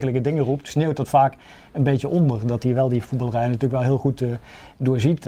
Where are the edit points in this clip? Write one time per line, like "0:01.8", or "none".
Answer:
none